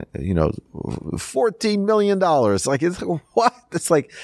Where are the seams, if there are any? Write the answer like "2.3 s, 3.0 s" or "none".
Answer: none